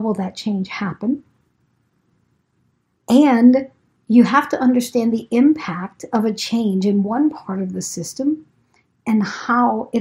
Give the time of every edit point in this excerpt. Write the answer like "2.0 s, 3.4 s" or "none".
3.0 s